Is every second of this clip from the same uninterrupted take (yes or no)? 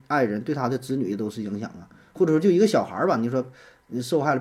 yes